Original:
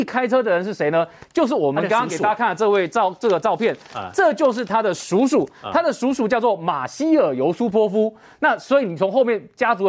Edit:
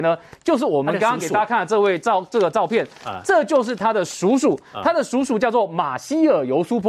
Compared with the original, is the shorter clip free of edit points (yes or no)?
yes